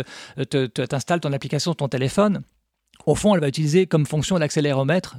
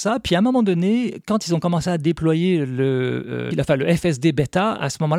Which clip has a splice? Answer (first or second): second